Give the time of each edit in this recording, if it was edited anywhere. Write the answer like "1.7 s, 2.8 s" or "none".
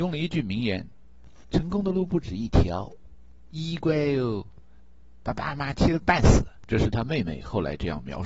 6.6 s